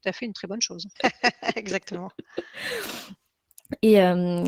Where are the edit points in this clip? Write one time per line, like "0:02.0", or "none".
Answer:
0:01.0